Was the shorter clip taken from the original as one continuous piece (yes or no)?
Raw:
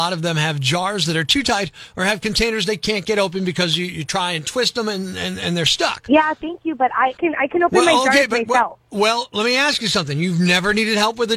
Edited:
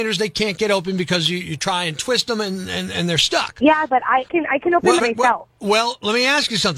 no